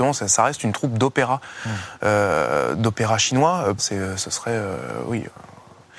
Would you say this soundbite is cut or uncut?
cut